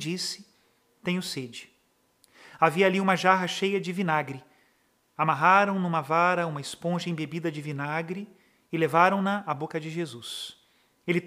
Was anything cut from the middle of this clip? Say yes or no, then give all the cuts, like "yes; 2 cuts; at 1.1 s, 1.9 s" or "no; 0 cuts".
no; 0 cuts